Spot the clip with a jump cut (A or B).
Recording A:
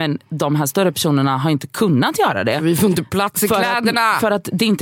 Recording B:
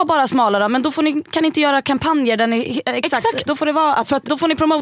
B